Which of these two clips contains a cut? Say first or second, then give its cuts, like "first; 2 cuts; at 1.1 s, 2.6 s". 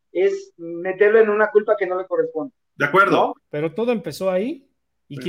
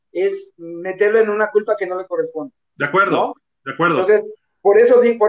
first; 1 cut; at 3.4 s